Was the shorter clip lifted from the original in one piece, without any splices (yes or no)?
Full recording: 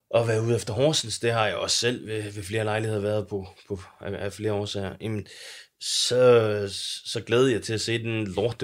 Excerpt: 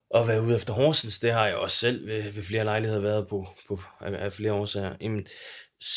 yes